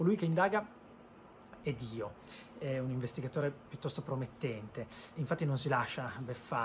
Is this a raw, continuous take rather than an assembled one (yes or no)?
no